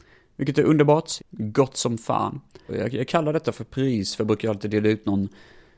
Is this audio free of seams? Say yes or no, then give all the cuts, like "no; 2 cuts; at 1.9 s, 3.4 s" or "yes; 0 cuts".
no; 2 cuts; at 1.2 s, 2.7 s